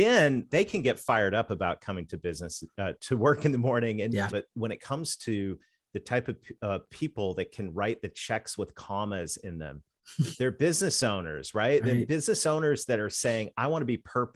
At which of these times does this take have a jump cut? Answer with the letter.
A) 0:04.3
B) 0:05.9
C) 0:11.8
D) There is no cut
A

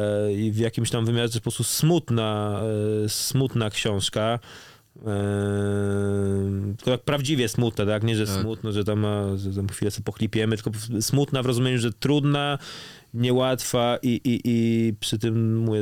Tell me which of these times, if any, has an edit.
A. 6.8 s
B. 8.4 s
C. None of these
C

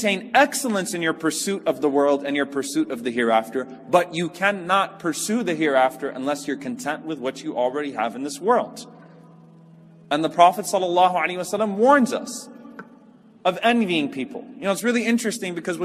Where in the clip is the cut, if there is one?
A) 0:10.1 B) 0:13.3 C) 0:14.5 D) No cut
D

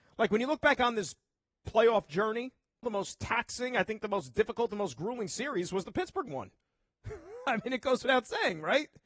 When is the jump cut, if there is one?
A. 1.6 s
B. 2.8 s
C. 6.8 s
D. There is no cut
B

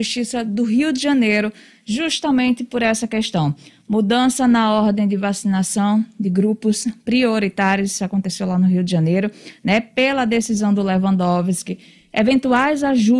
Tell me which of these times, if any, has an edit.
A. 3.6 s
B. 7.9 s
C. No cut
C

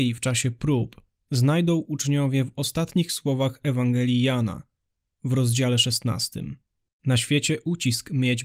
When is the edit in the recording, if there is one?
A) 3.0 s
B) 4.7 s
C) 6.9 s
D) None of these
C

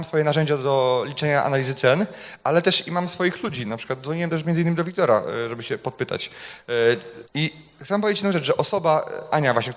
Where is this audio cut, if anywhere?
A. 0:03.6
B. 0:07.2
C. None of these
B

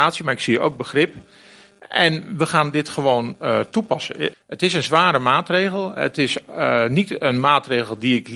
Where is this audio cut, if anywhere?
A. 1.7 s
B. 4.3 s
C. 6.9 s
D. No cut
B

